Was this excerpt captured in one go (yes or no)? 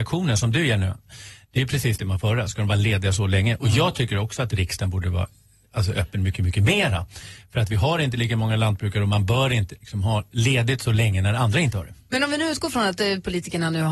yes